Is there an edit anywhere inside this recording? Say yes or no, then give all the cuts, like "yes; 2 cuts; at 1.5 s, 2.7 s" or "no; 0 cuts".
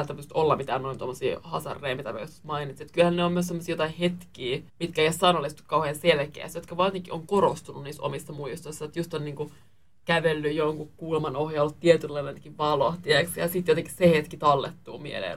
yes; 1 cut; at 4.7 s